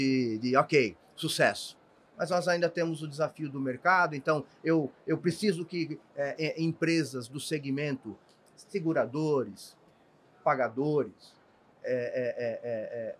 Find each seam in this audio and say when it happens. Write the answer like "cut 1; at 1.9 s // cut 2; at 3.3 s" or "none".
none